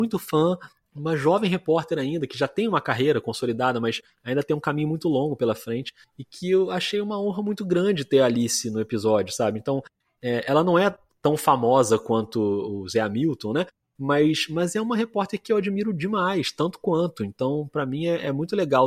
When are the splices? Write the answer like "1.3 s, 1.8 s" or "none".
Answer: none